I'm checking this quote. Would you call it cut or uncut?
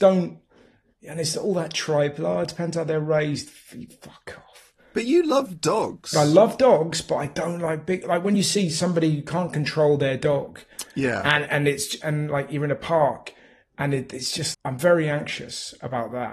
cut